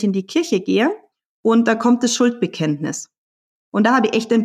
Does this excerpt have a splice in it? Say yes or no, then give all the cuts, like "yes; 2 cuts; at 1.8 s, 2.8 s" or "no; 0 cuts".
no; 0 cuts